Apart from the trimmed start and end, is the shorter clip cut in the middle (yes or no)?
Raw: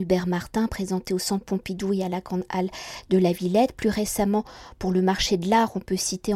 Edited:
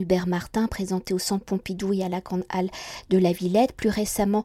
no